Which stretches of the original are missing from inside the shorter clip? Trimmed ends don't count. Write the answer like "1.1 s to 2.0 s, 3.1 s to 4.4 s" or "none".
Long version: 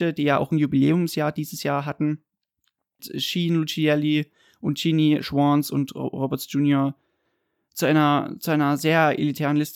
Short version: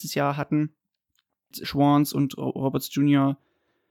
3.1 s to 5.2 s